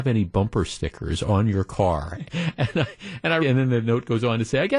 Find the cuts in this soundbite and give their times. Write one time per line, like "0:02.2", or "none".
0:02.2
0:03.4